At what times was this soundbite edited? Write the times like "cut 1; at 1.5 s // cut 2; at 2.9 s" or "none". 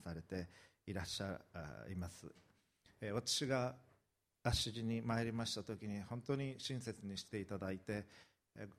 none